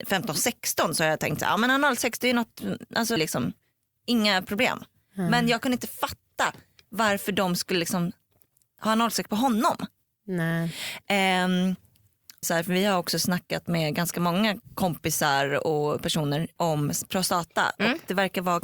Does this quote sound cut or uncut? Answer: cut